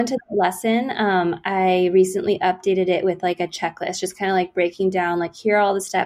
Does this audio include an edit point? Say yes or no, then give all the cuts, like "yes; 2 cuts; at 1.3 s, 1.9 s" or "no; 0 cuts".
no; 0 cuts